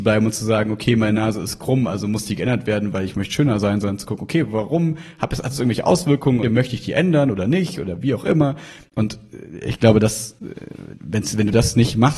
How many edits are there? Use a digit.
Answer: 1